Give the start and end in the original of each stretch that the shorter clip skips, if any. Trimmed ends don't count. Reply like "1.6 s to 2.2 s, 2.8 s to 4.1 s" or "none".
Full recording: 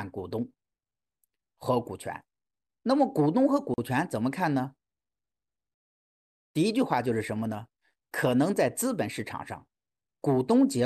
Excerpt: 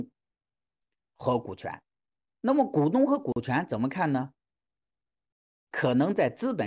6.1 s to 8.1 s